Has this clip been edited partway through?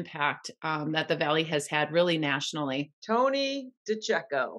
yes; 1 cut; at 3.0 s

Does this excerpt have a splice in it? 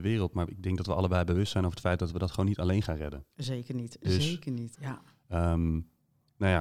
yes; 1 cut; at 4.7 s

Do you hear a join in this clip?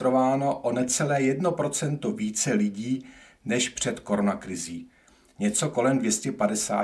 no; 0 cuts

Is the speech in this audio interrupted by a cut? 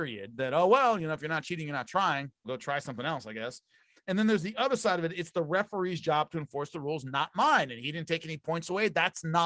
yes; 1 cut; at 2.4 s

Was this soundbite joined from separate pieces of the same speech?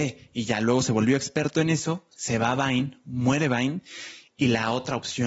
no; 0 cuts

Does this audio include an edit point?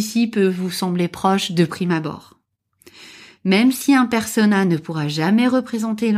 no; 0 cuts

